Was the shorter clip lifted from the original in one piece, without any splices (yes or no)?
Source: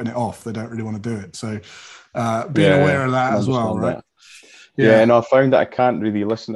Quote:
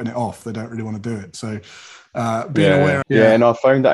no